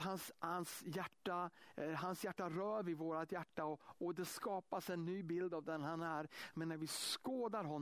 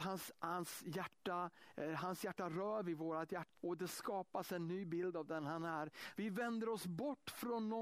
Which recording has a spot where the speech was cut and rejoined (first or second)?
second